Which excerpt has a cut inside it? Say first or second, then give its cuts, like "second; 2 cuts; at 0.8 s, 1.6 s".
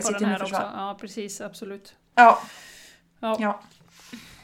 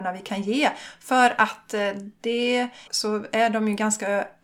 second; 1 cut; at 2.9 s